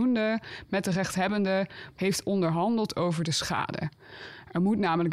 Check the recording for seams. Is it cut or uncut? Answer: cut